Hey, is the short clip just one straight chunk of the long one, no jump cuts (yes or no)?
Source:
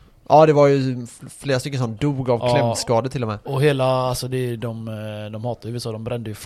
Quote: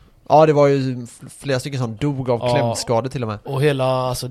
yes